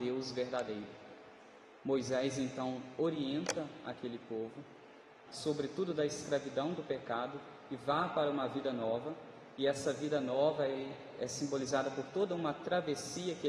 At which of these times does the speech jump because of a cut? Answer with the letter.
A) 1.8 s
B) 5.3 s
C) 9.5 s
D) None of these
B